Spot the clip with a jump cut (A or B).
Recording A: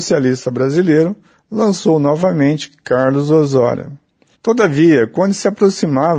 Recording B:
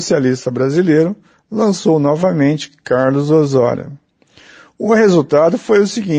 A